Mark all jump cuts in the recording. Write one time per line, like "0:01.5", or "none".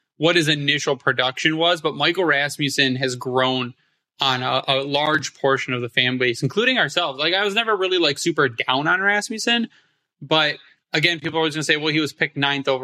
none